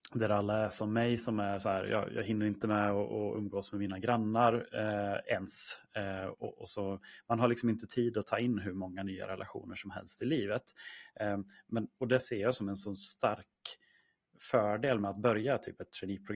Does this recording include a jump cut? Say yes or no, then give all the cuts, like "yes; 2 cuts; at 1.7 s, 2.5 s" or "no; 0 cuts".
no; 0 cuts